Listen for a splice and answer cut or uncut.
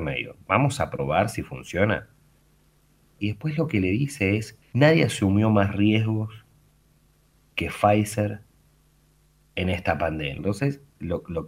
cut